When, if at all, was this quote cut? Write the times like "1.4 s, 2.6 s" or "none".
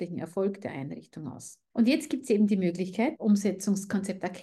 1.7 s, 3.1 s